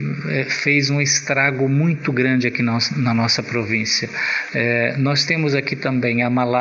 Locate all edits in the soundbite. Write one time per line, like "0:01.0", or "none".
0:04.5